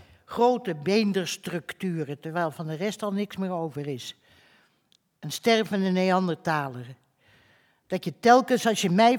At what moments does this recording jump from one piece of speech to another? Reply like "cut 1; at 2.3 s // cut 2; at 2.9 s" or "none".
none